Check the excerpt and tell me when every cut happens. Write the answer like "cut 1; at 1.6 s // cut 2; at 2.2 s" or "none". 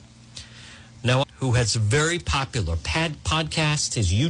cut 1; at 1.2 s